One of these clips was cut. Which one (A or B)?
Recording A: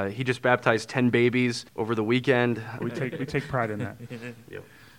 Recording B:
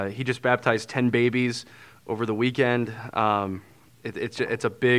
A